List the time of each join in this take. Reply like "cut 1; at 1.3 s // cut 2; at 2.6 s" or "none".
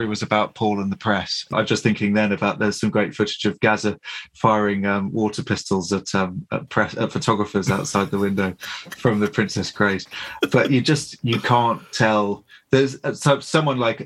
cut 1; at 1.5 s